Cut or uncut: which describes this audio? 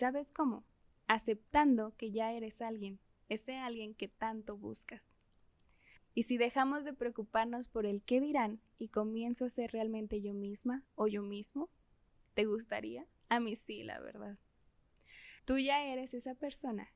cut